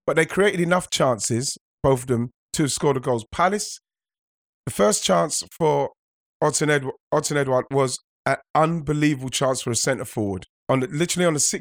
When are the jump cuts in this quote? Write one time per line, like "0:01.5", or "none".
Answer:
none